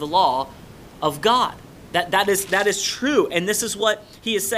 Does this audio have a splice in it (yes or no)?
no